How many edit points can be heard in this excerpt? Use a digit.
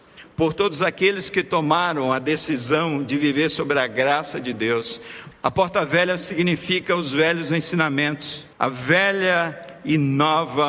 2